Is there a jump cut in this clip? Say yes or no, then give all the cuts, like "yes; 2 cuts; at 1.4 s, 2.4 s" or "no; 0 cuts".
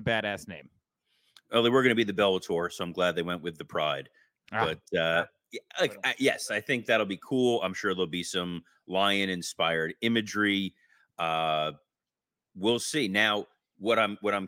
no; 0 cuts